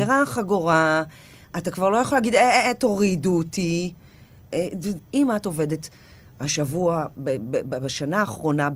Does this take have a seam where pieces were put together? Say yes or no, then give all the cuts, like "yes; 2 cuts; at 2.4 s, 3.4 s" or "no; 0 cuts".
yes; 1 cut; at 5.0 s